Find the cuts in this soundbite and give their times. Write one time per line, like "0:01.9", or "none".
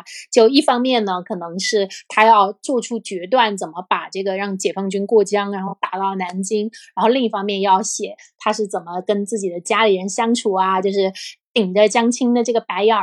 none